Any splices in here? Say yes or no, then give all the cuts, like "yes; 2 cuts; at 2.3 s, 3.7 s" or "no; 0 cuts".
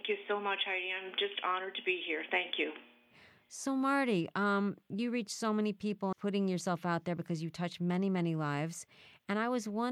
yes; 1 cut; at 6.1 s